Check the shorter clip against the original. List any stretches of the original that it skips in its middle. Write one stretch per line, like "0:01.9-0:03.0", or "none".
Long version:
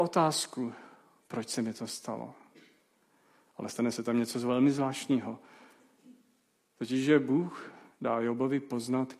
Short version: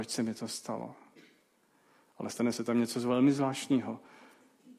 none